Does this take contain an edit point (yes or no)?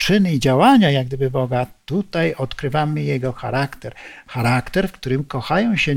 no